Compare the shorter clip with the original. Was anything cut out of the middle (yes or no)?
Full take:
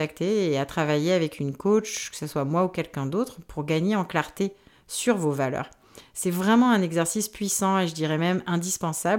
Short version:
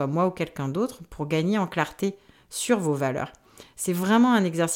no